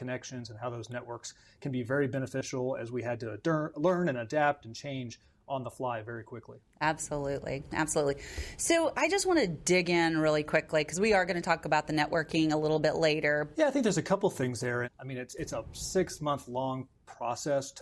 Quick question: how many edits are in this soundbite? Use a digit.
3